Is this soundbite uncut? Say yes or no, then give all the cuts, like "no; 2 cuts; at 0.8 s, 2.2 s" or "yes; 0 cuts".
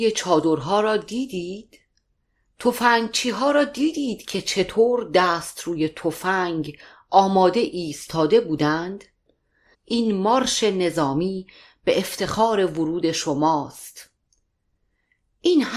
no; 1 cut; at 9.7 s